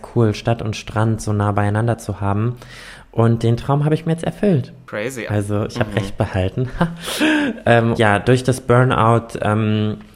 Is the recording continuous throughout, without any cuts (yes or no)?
no